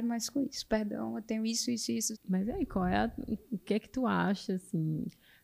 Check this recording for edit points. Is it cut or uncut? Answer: cut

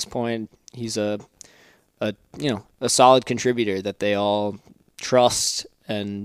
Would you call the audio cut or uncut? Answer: uncut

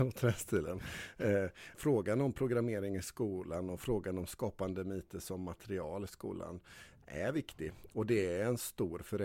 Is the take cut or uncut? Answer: cut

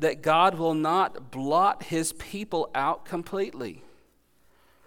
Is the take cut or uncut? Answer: uncut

